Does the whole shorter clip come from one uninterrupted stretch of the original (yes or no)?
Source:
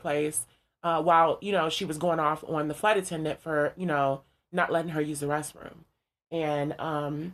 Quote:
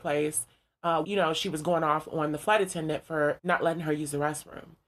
no